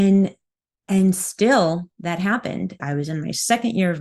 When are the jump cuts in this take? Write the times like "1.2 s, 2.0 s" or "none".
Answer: 2.8 s